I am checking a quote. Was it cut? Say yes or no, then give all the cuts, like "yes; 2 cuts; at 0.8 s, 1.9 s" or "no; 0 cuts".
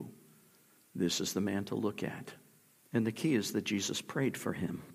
yes; 1 cut; at 2.7 s